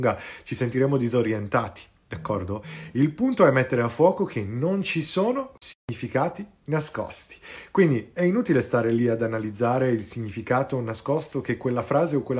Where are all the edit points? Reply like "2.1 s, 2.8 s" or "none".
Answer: none